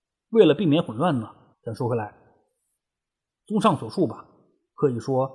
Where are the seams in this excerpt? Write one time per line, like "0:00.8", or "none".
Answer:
0:01.5